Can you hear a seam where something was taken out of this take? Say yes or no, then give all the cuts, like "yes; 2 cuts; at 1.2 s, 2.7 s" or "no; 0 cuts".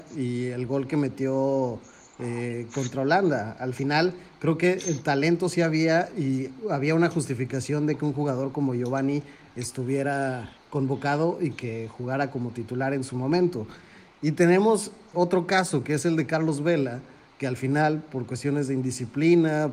yes; 1 cut; at 15.1 s